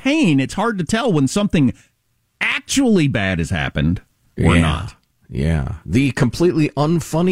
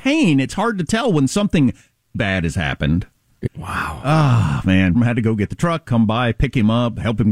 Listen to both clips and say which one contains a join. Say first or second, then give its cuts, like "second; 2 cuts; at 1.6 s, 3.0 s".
second; 3 cuts; at 2.1 s, 3.5 s, 4.9 s